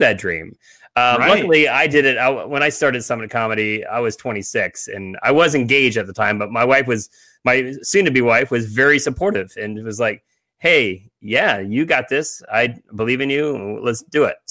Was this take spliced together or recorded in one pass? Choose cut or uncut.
uncut